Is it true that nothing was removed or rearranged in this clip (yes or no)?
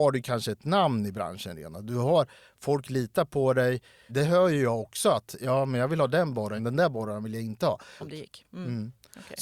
no